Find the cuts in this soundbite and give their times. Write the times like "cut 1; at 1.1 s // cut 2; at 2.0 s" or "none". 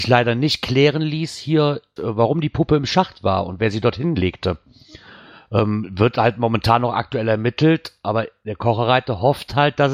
cut 1; at 2.0 s